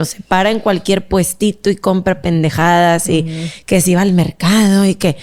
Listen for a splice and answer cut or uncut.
uncut